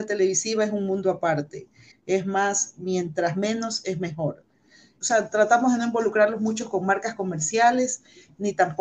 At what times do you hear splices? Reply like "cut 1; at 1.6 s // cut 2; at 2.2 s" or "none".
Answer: cut 1; at 1.9 s // cut 2; at 5.0 s